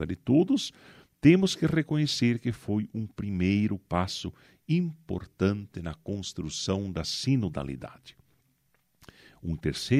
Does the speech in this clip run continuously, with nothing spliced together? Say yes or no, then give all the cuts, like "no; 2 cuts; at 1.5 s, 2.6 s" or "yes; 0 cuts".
yes; 0 cuts